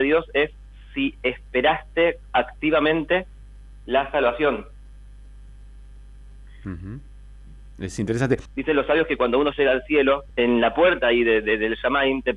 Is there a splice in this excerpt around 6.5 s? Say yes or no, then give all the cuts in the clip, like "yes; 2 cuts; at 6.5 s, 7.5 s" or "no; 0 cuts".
no; 2 cuts; at 8.5 s, 10.3 s